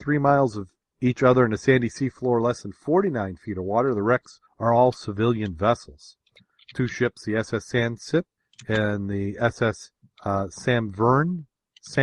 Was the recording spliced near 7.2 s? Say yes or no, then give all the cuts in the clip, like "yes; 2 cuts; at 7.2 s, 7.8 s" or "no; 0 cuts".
no; 0 cuts